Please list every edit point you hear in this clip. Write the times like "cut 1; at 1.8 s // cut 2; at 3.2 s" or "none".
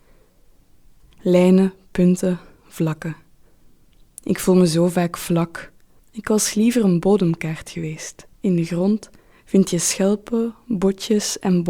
cut 1; at 1.0 s // cut 2; at 6.0 s // cut 3; at 8.3 s